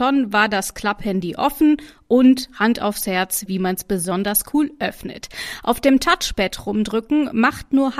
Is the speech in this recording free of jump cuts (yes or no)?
no